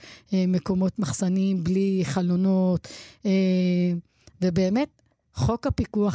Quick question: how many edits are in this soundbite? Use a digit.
0